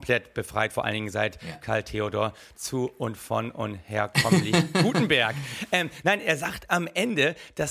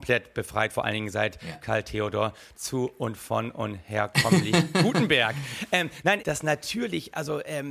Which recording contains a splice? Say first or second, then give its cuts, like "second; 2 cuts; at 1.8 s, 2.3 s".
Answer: second; 1 cut; at 6.2 s